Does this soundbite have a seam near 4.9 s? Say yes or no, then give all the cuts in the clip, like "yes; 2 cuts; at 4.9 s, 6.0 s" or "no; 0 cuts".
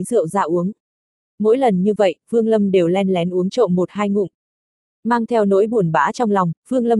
yes; 1 cut; at 4.9 s